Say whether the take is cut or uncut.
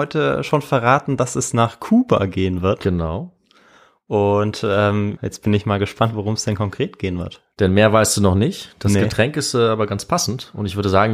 cut